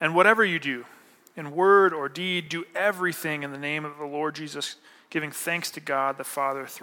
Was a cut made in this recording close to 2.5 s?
no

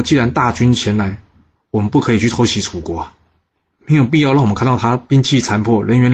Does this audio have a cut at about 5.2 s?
no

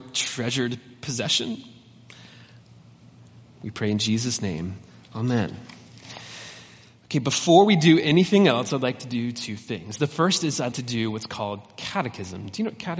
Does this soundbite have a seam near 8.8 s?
no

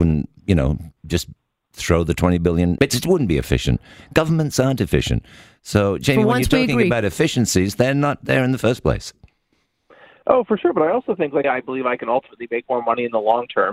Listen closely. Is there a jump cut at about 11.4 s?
yes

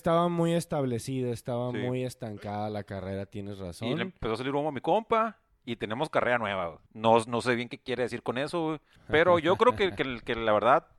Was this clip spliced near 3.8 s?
no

